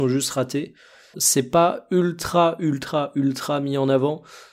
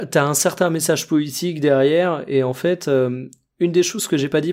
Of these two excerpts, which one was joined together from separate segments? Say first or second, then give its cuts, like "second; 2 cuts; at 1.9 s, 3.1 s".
first; 1 cut; at 1.1 s